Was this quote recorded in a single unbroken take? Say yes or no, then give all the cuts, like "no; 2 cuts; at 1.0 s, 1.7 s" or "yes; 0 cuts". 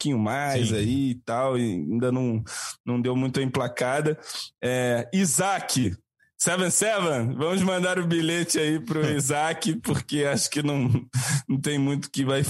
yes; 0 cuts